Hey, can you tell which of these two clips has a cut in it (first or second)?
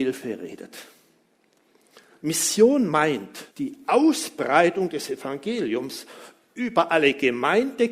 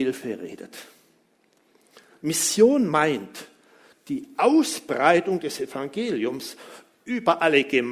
first